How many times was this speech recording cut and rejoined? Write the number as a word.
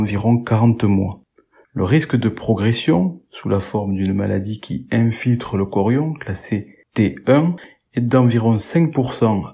zero